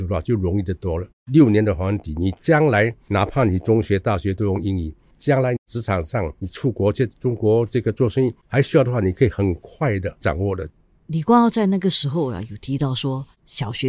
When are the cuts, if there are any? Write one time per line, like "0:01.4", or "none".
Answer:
none